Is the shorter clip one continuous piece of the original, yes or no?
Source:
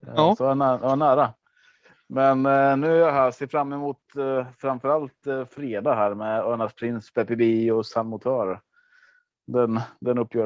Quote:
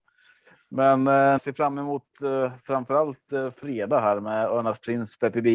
no